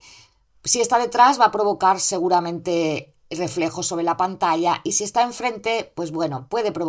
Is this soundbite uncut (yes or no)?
yes